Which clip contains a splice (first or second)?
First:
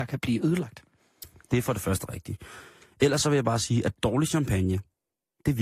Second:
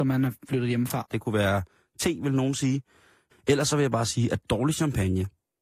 second